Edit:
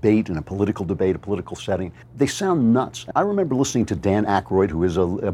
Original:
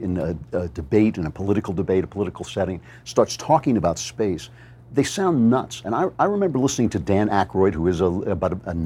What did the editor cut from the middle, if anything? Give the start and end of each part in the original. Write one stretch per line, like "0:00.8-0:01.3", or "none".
0:02.9-0:04.8
0:05.9-0:06.1